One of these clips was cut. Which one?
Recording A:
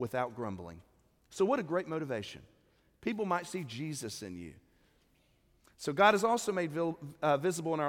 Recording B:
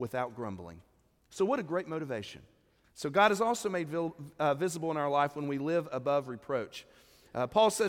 B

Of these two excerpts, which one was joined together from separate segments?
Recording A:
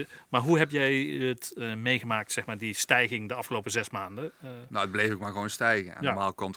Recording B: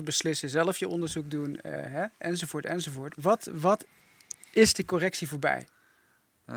B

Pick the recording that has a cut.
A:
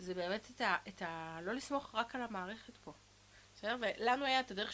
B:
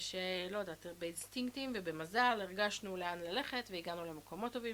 A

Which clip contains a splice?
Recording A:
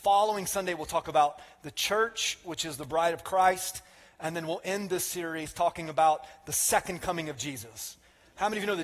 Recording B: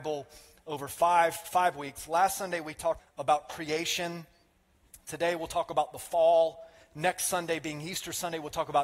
B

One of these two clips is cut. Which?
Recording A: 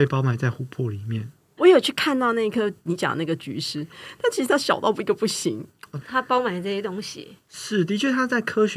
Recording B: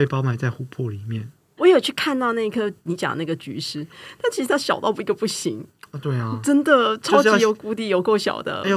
A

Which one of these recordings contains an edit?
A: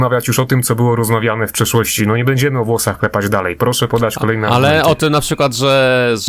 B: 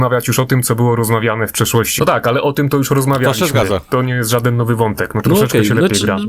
B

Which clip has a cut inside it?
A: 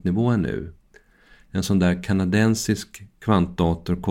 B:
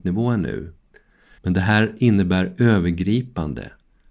B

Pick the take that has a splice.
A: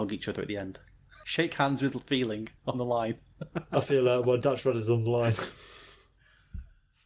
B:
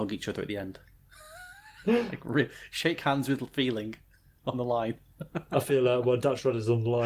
A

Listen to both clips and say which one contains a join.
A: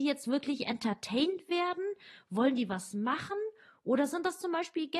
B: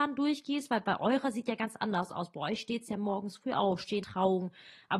B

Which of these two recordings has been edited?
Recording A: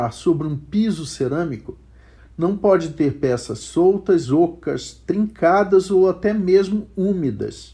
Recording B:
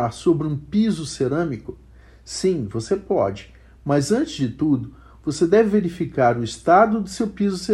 A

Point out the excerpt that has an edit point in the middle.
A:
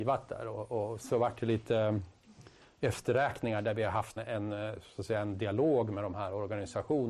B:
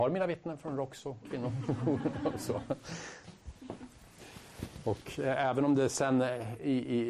A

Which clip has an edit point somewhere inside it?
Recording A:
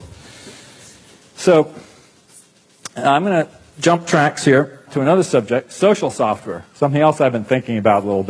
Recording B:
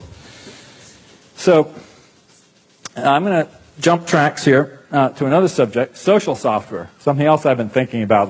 A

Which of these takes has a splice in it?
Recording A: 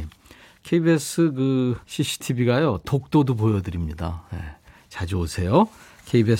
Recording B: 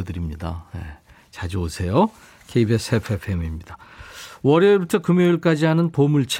A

